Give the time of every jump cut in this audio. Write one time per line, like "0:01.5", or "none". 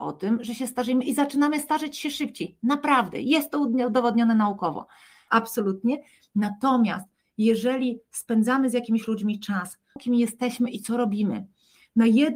0:05.3
0:10.0